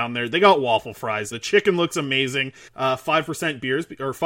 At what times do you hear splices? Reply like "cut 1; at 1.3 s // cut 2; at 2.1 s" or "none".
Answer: cut 1; at 1.3 s // cut 2; at 2.7 s